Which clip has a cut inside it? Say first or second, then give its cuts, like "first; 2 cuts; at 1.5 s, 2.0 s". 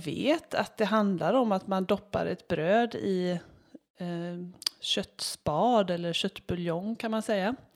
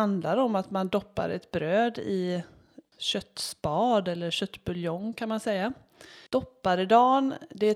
second; 2 cuts; at 2.9 s, 6.3 s